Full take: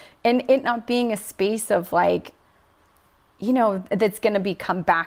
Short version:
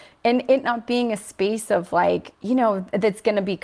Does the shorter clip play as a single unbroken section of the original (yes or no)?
no